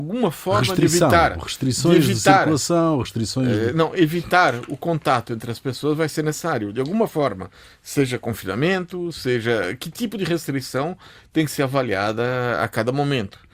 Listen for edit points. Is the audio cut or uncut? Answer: uncut